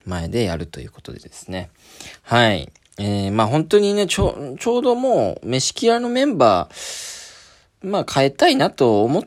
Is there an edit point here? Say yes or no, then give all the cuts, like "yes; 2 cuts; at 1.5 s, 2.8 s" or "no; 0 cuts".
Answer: no; 0 cuts